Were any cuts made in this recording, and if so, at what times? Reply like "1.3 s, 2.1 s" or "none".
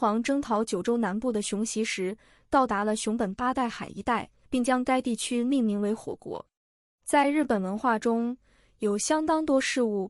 4.4 s